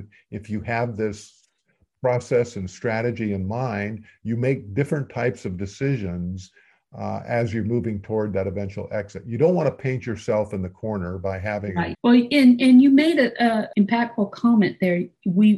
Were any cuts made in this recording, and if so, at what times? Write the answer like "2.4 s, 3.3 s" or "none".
11.9 s, 13.7 s